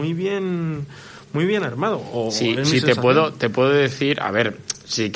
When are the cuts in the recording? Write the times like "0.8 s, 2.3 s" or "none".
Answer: none